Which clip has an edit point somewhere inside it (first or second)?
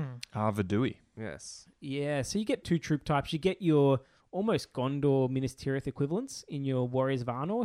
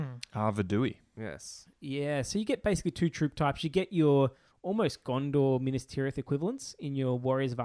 first